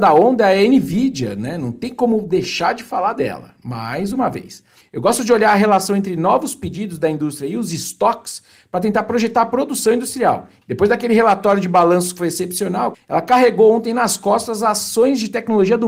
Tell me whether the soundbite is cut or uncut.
cut